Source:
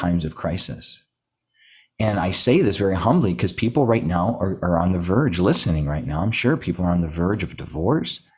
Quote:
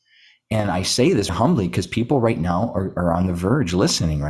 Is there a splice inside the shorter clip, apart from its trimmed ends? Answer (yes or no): yes